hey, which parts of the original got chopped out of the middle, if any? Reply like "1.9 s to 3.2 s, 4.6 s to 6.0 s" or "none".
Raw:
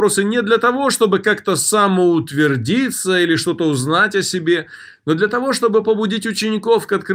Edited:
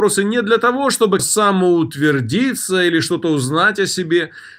1.2 s to 1.6 s